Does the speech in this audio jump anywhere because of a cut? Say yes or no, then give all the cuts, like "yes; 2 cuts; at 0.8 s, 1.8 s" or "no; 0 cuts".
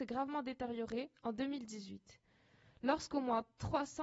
no; 0 cuts